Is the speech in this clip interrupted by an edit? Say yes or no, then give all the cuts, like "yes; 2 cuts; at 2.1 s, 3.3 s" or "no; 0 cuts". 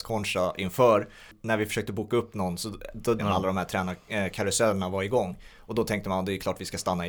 yes; 1 cut; at 3.2 s